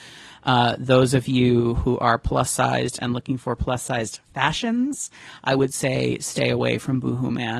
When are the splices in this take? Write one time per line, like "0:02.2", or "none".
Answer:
none